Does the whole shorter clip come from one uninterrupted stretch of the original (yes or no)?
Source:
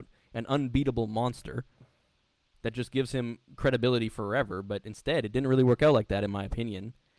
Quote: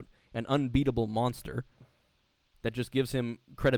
yes